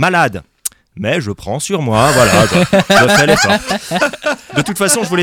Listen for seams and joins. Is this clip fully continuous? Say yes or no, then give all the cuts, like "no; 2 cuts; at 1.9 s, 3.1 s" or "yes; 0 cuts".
yes; 0 cuts